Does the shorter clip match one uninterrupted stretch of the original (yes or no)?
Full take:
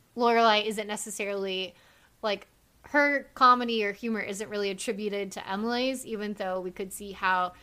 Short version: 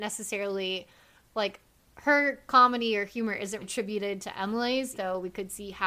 no